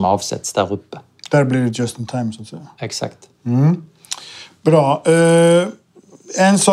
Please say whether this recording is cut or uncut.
uncut